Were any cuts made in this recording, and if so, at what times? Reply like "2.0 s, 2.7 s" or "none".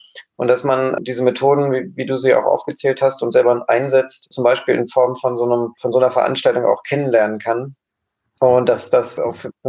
none